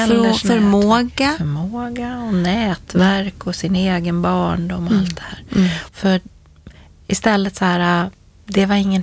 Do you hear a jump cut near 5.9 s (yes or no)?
yes